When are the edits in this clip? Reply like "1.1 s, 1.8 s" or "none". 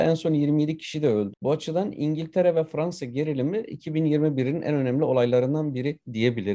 1.3 s